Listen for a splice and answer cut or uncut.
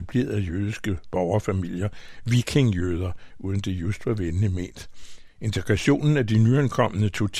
cut